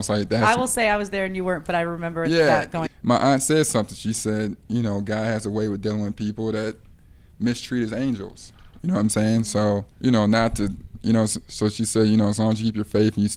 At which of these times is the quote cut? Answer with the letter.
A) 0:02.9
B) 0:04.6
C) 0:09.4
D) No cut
A